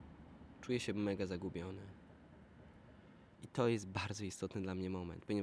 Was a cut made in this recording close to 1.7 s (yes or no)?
no